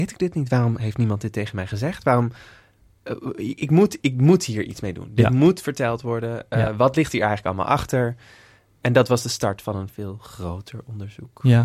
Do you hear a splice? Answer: no; 0 cuts

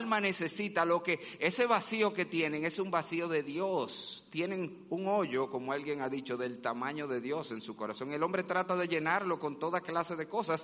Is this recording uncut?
yes; 0 cuts

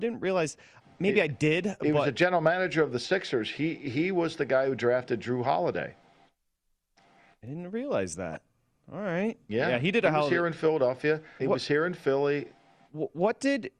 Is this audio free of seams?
no; 1 cut; at 11.4 s

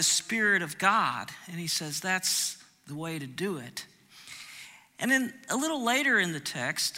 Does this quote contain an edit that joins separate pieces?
no; 0 cuts

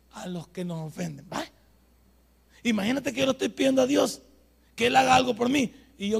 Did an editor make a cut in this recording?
no; 0 cuts

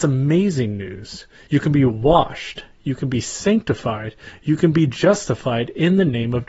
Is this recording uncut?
yes; 0 cuts

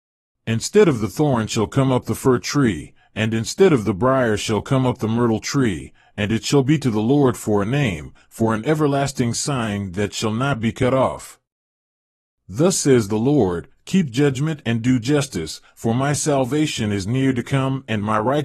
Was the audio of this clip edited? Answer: no; 0 cuts

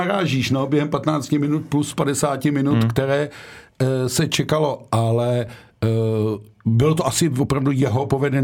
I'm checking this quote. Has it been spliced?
no; 0 cuts

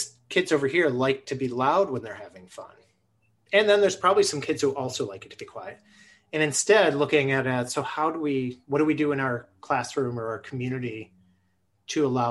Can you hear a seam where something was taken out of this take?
no; 0 cuts

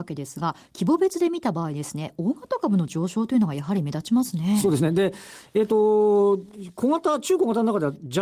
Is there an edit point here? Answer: yes; 1 cut; at 4.6 s

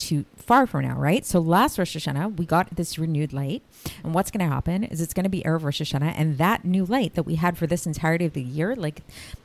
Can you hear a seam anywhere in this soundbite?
no; 0 cuts

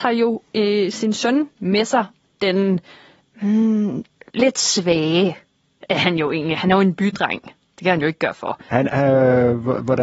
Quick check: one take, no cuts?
no; 1 cut; at 8.9 s

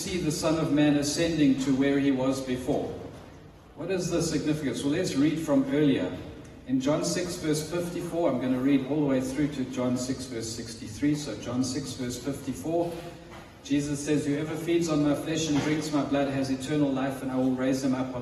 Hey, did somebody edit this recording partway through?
no; 0 cuts

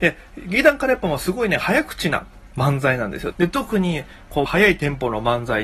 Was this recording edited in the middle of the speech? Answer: yes; 2 cuts; at 3.3 s, 4.5 s

